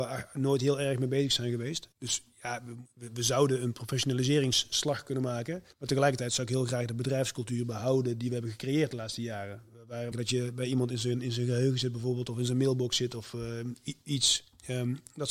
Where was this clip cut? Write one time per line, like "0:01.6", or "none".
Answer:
0:05.7
0:10.1

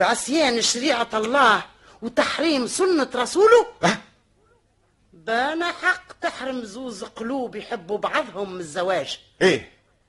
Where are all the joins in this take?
0:05.0

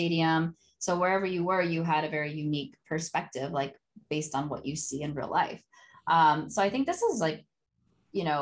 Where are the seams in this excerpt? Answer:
none

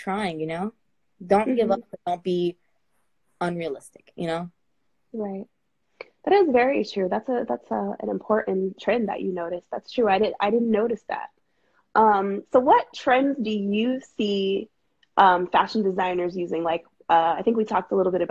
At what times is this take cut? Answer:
none

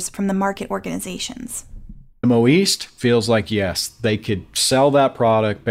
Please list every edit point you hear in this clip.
0:02.2

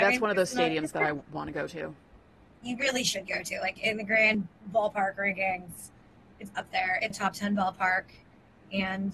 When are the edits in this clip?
0:07.1

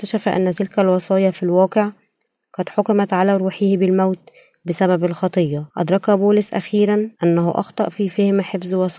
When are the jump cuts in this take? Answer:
0:05.7
0:07.1

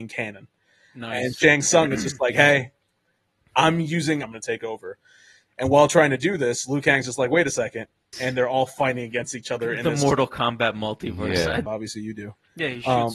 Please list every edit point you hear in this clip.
0:04.2
0:08.1
0:11.7

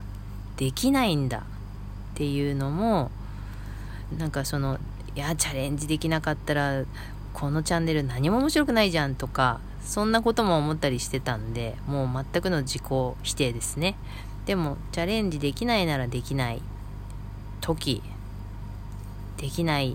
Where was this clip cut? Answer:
0:14.4

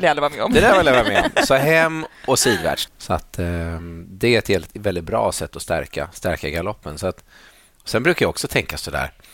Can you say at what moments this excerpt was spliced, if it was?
0:02.9

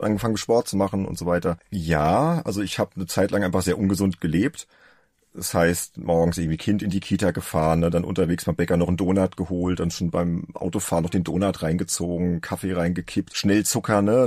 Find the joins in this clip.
0:01.6

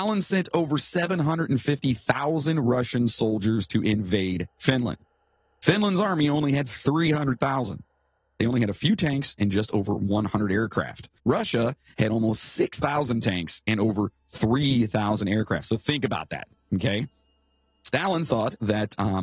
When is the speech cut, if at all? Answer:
0:11.2

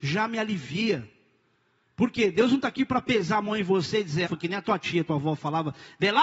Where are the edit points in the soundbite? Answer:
0:04.2

